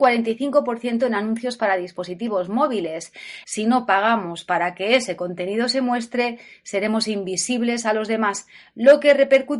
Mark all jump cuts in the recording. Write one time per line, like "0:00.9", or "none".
0:03.4